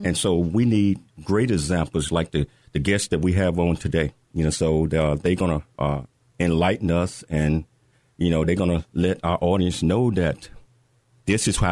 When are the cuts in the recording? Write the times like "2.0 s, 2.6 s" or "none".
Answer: none